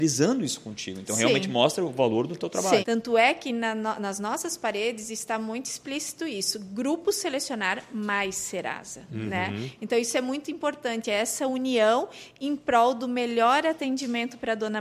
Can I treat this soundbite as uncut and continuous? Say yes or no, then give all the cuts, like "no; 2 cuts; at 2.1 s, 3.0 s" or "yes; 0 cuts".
no; 1 cut; at 2.8 s